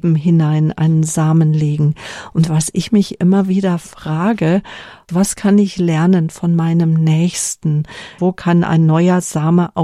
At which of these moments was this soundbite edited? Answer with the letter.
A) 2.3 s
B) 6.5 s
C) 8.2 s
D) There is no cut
C